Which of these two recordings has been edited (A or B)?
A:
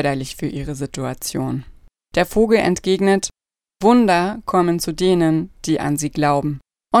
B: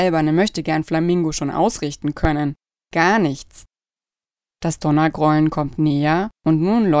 A